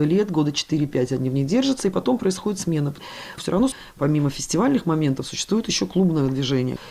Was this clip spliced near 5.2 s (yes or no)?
no